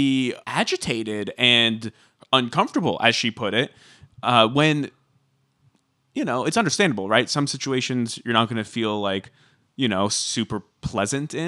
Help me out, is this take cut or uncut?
uncut